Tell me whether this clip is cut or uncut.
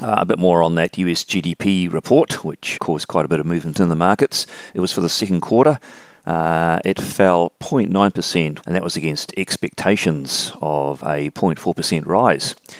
cut